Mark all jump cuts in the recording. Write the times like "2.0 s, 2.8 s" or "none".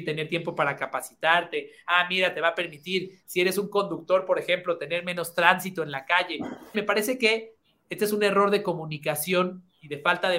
6.7 s